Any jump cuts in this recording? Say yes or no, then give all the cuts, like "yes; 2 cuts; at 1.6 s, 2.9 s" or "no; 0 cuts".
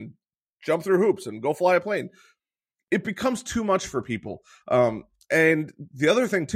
no; 0 cuts